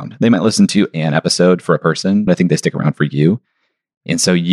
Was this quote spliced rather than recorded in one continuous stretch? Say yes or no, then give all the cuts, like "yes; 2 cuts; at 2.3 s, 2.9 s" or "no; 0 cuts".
yes; 1 cut; at 2.3 s